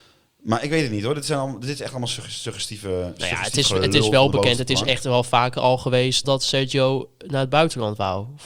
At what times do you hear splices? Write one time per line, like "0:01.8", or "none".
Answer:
0:06.2

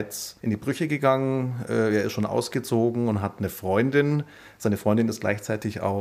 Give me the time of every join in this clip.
none

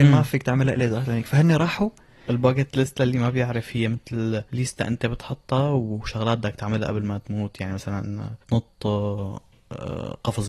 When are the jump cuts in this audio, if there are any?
0:04.5
0:08.4

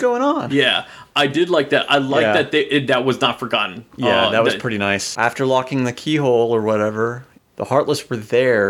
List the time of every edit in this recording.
0:05.1
0:07.4

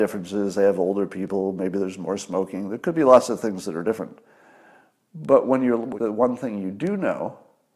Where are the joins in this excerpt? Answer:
0:06.0

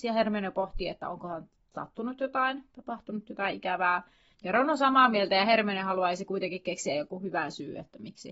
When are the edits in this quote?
0:04.3

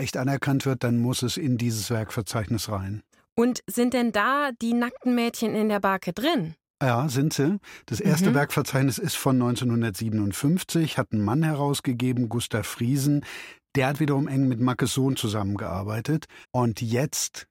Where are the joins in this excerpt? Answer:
0:16.4

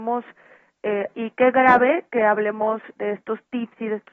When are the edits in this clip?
0:01.1
0:03.0

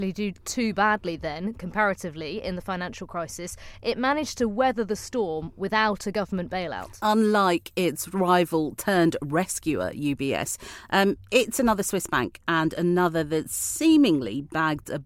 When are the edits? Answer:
none

